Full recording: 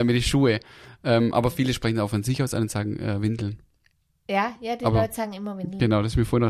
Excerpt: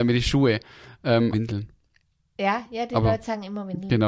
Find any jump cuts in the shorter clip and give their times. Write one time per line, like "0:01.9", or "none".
0:01.3